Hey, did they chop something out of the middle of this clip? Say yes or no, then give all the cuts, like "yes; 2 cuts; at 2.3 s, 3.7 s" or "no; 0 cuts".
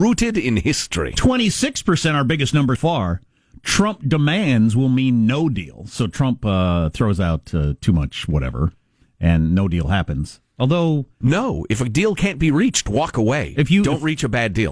yes; 2 cuts; at 2.8 s, 11.2 s